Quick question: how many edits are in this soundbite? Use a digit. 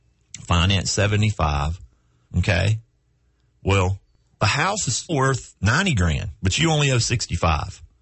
3